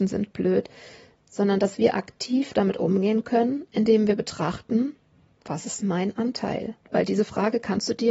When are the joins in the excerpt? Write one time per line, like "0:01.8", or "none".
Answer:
0:06.8